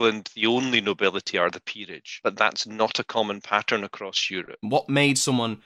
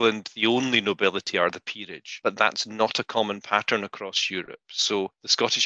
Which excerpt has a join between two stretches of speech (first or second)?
first